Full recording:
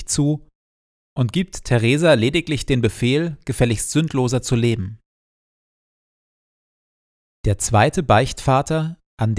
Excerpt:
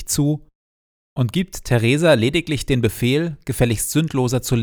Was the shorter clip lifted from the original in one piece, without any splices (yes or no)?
yes